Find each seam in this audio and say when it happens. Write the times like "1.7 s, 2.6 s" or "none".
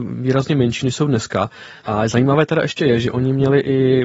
1.8 s